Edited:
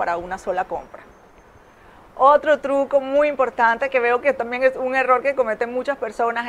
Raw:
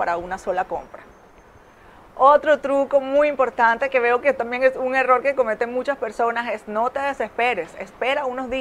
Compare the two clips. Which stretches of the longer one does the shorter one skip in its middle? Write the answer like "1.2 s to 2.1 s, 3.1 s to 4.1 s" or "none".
none